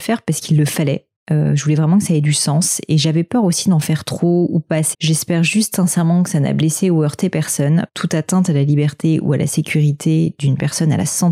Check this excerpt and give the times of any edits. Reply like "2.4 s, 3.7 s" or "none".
4.9 s, 7.9 s